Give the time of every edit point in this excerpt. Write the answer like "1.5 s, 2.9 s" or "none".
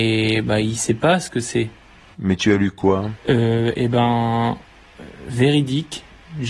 2.1 s